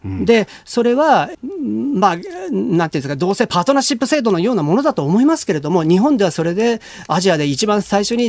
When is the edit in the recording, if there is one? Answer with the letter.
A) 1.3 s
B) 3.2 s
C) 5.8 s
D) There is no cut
A